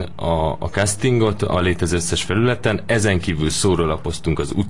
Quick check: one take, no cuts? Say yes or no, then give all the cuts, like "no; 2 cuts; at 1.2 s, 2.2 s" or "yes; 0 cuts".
yes; 0 cuts